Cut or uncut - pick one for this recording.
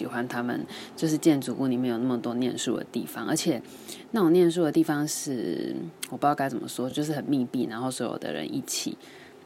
uncut